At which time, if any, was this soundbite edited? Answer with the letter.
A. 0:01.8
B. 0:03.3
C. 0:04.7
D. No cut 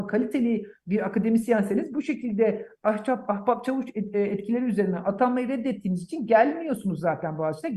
D